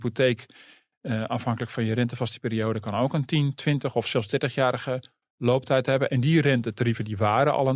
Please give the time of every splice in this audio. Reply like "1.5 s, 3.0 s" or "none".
none